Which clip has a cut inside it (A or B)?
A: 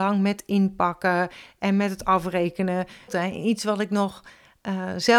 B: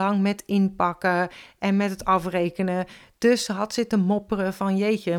A